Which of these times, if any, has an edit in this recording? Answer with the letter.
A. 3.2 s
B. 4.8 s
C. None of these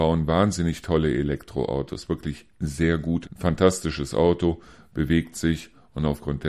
A